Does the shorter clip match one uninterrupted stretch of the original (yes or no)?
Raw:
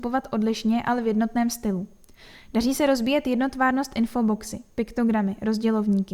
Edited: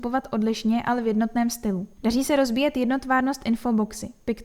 no